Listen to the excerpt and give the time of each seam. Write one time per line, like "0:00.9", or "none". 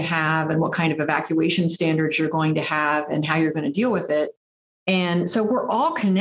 0:04.7